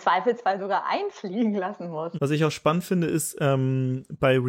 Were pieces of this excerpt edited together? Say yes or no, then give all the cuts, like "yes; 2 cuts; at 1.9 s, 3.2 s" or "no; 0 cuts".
yes; 1 cut; at 2.1 s